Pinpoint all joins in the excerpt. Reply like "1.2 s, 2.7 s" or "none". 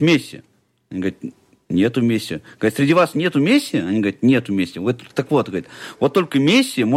none

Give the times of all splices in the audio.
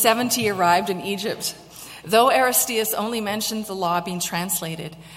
2.0 s

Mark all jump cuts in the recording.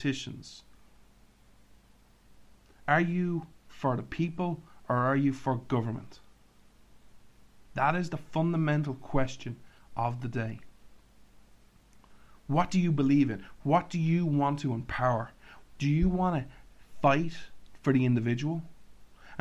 2.8 s, 15.6 s

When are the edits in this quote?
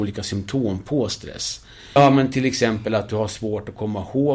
2.0 s

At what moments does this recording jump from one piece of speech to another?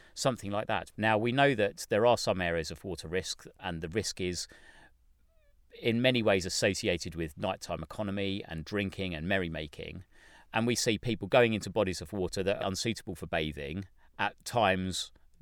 0.9 s, 12.6 s

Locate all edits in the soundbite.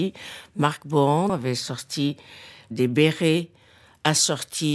1.3 s

